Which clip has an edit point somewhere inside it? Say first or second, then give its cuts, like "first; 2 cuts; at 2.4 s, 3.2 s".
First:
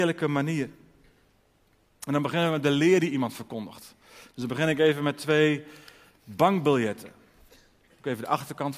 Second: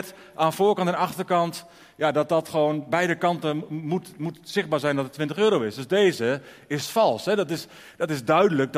first; 1 cut; at 7.9 s